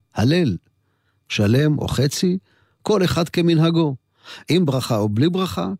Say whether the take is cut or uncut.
uncut